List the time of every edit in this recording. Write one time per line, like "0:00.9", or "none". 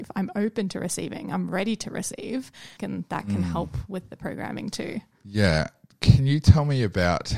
0:02.8